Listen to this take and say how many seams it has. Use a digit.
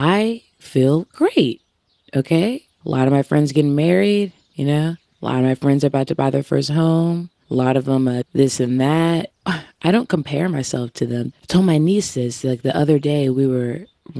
2